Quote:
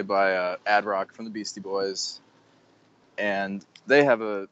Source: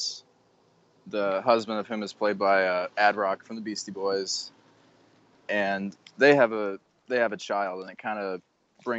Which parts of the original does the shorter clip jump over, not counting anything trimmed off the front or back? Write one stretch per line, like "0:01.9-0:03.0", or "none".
none